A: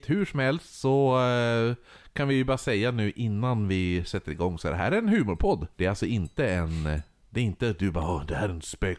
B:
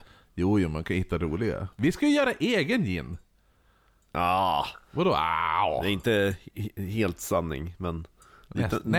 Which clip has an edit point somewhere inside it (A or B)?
A